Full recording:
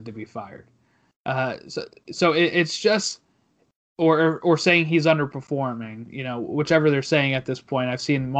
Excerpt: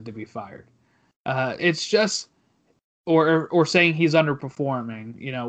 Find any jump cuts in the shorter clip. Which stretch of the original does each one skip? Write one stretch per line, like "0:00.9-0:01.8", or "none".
0:01.6-0:02.5